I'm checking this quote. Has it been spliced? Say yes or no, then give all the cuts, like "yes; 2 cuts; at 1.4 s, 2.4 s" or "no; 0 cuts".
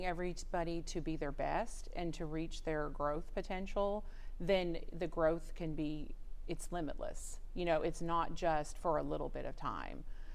no; 0 cuts